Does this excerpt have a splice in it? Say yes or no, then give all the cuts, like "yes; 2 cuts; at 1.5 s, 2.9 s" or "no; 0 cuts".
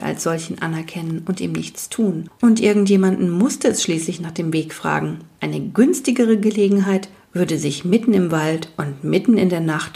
no; 0 cuts